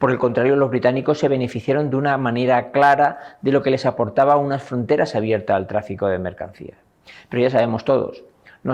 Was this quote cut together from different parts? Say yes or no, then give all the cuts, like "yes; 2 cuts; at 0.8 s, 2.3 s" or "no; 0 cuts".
no; 0 cuts